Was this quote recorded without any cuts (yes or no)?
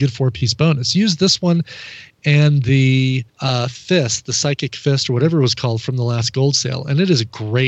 no